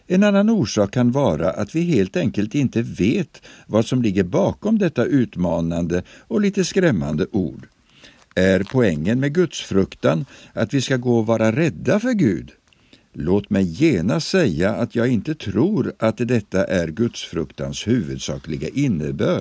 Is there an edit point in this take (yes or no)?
no